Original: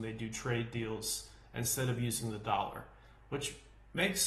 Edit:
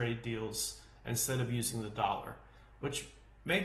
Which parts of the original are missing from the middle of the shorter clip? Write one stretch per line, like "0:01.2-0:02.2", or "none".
none